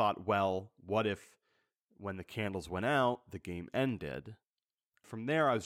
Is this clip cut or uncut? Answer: uncut